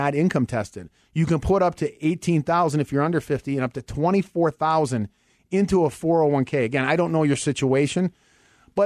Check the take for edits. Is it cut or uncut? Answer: uncut